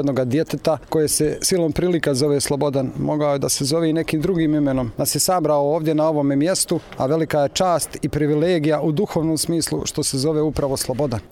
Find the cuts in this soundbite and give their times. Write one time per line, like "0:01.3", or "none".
0:04.9